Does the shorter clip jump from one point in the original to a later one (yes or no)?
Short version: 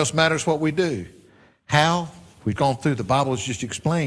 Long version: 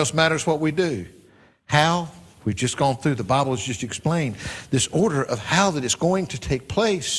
yes